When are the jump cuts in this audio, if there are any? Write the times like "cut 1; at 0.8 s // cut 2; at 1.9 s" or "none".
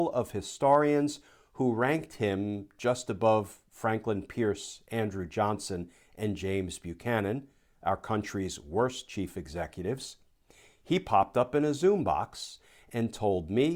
none